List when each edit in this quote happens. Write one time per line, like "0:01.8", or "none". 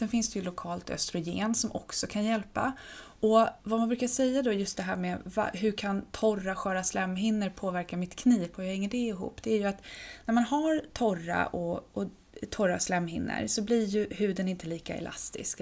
0:03.6